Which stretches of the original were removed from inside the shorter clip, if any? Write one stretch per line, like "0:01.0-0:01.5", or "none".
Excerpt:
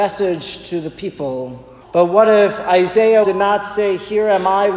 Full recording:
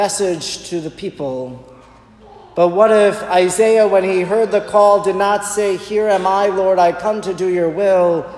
0:01.8-0:02.5
0:03.9-0:05.0